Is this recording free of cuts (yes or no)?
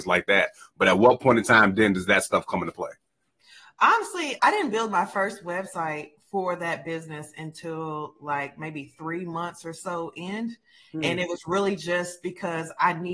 no